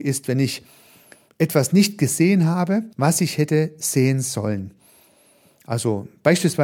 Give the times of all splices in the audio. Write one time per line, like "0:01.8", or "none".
0:02.9